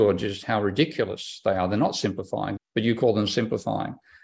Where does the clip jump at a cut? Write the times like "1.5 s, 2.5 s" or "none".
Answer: 2.6 s

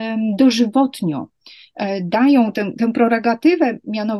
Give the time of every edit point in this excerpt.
none

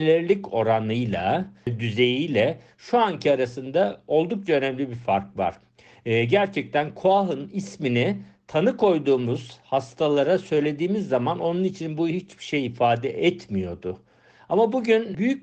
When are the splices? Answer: none

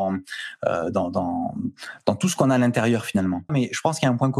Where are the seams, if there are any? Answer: 3.5 s

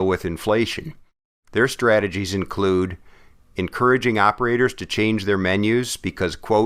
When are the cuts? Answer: none

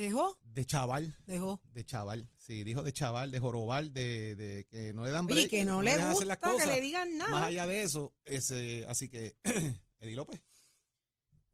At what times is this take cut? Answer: none

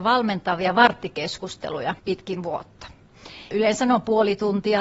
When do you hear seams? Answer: 2.0 s, 3.5 s

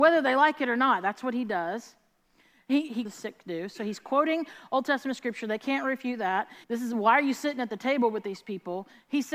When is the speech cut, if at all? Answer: 3.0 s, 6.6 s

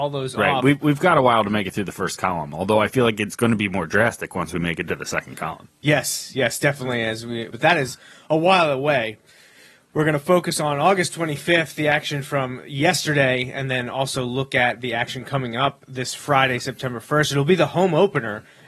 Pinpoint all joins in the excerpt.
7.5 s

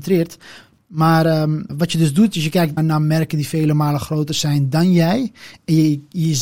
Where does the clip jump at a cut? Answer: 1.7 s, 2.8 s

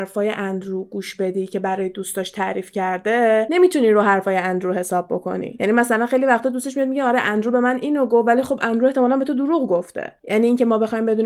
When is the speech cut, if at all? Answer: 10.2 s

